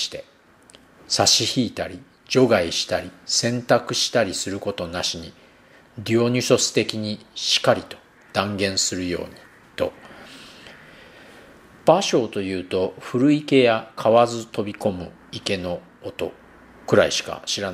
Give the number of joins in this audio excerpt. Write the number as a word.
one